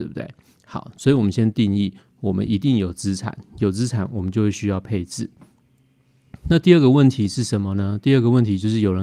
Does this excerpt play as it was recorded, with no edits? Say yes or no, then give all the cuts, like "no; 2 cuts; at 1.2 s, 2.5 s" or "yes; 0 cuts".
yes; 0 cuts